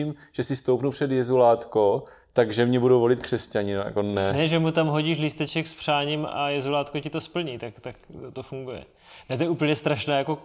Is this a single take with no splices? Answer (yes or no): yes